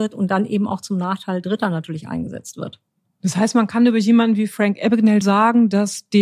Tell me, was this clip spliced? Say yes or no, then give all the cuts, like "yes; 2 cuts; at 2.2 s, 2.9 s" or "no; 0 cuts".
yes; 1 cut; at 5.2 s